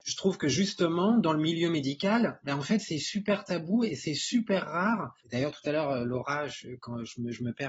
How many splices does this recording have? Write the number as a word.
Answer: one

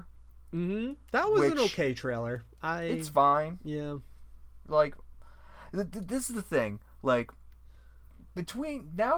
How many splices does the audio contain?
zero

